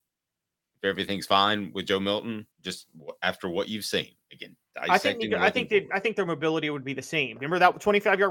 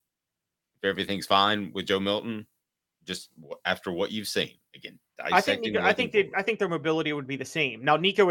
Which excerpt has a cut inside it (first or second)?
first